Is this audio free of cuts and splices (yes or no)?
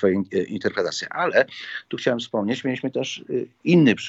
yes